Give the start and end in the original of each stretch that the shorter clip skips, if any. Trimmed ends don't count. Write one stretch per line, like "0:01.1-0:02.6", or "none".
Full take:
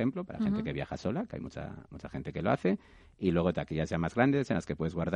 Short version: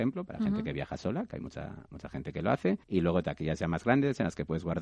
0:02.8-0:03.1